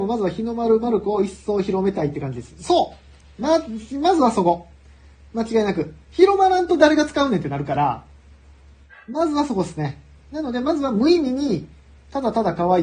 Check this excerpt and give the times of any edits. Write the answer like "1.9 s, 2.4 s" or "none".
none